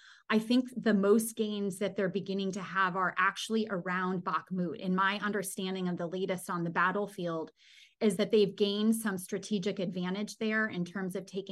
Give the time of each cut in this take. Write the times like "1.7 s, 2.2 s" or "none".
none